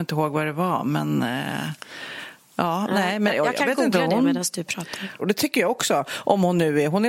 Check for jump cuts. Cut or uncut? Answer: cut